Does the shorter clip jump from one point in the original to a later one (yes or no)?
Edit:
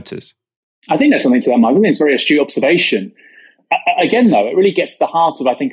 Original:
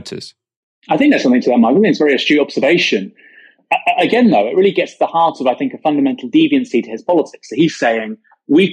no